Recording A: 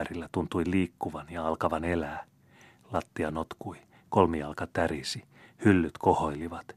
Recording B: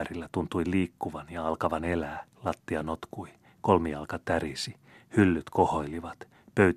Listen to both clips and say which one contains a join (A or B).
B